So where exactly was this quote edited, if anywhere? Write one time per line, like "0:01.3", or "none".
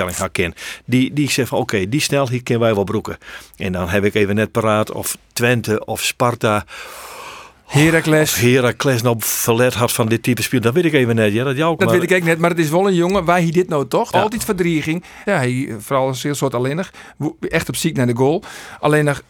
0:11.8
0:14.1
0:15.3